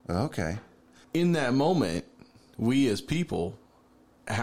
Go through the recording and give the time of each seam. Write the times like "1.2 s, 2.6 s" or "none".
1.0 s